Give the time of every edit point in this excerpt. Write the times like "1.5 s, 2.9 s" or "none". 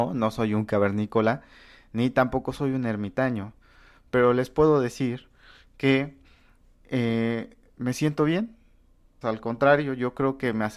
9.2 s